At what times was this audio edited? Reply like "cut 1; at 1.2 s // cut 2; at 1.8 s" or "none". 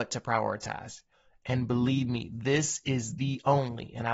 cut 1; at 1.3 s